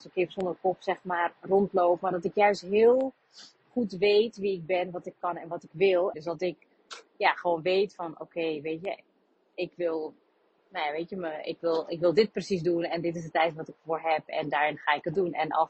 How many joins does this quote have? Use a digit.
1